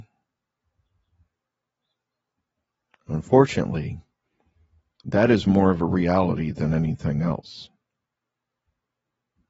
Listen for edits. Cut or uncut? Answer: uncut